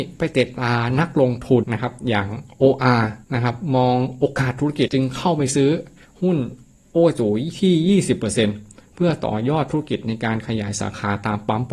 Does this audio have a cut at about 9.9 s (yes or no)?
no